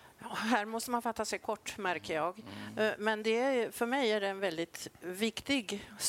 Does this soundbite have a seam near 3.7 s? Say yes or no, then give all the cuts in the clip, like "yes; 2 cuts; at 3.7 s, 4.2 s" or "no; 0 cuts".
no; 0 cuts